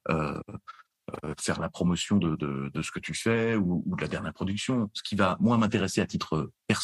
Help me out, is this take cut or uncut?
uncut